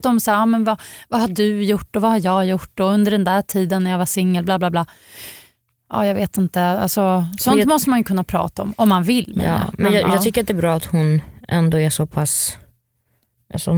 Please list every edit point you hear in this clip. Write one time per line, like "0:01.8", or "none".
none